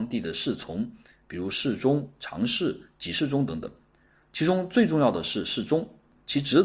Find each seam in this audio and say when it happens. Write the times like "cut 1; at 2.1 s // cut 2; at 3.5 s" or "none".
none